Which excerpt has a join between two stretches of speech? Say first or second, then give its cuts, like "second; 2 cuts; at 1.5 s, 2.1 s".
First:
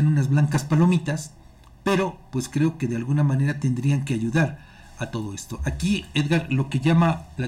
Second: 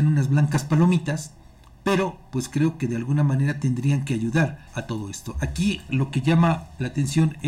second; 2 cuts; at 4.7 s, 5.9 s